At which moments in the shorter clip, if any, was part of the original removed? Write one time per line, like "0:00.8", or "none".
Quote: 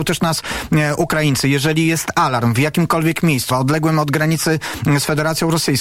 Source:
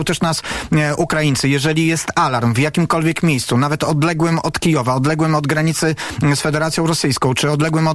0:03.5